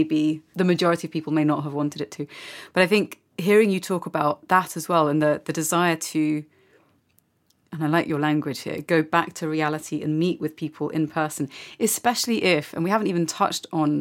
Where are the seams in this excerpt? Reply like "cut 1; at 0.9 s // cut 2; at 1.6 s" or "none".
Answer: none